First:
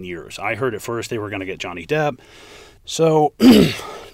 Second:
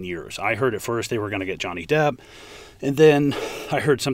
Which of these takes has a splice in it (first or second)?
first